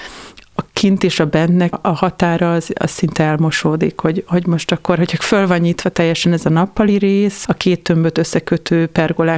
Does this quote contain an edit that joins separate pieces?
yes; 2 cuts; at 1.7 s, 7.4 s

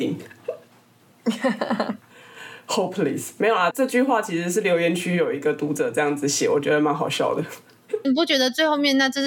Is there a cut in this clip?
yes; 2 cuts; at 3.7 s, 8.0 s

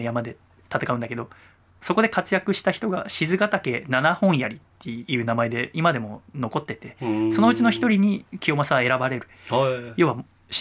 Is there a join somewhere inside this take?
no; 0 cuts

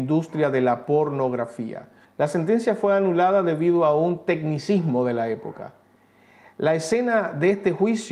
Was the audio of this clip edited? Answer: yes; 1 cut; at 2.0 s

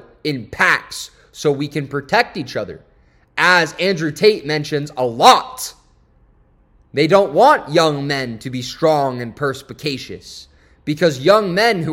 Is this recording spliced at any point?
no; 0 cuts

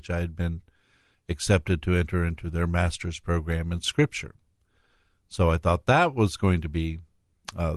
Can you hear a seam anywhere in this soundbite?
no; 0 cuts

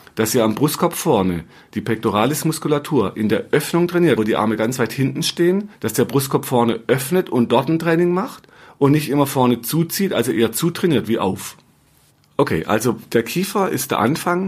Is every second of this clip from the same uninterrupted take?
no; 1 cut; at 4.2 s

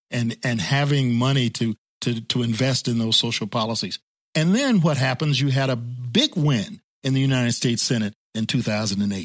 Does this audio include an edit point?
no; 0 cuts

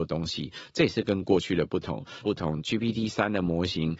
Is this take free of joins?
no; 1 cut; at 2.2 s

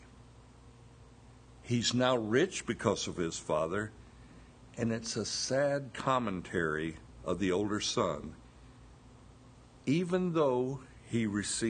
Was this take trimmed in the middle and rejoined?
yes; 1 cut; at 1.6 s

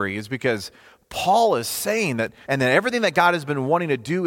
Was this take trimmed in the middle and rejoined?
yes; 1 cut; at 2.4 s

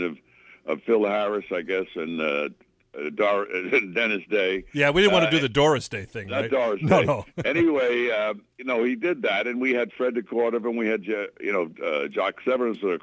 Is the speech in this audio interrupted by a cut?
yes; 1 cut; at 8.5 s

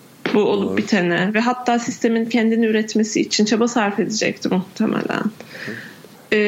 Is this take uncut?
yes; 0 cuts

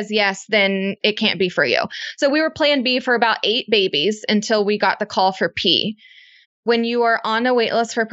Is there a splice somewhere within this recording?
yes; 1 cut; at 6.4 s

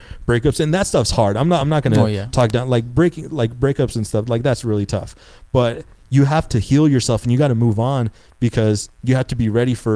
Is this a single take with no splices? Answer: yes; 0 cuts

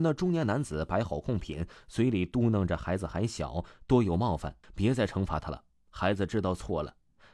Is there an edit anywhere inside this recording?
yes; 1 cut; at 4.6 s

